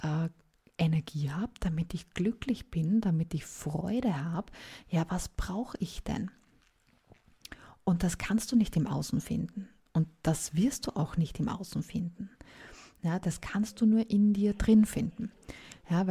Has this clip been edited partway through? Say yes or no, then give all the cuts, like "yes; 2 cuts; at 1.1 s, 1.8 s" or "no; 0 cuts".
no; 0 cuts